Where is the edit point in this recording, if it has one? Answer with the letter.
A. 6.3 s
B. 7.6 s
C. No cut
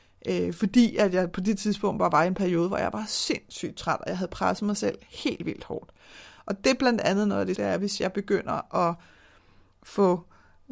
B